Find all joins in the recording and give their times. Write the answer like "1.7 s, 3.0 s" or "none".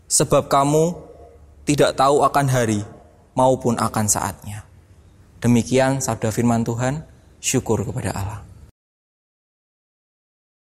none